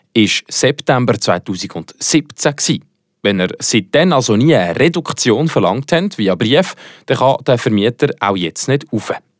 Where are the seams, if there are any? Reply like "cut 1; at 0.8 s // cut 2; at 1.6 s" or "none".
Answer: none